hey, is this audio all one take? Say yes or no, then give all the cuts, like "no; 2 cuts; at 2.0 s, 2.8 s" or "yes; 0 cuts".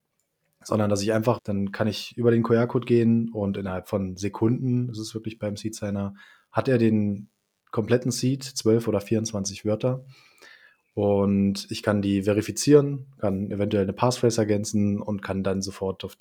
no; 1 cut; at 1.4 s